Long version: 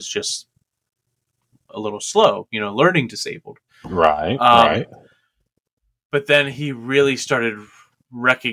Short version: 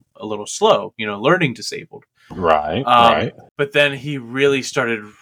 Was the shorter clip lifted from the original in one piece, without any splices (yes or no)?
no